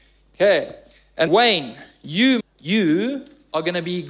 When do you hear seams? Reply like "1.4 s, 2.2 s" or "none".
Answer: 1.3 s, 2.4 s